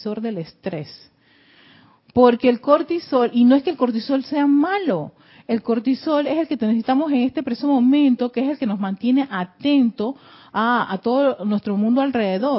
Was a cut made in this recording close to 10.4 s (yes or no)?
no